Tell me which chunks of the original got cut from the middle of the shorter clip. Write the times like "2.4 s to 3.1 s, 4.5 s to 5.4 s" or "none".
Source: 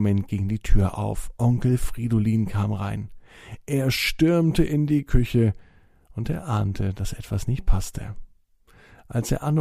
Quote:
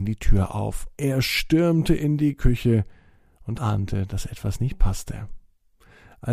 1.4 s to 3.6 s, 6.2 s to 6.4 s